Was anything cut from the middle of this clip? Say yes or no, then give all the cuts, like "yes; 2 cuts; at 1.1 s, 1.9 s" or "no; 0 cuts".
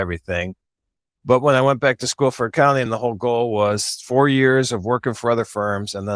no; 0 cuts